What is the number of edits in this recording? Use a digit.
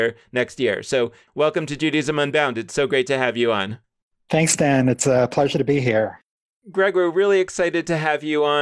1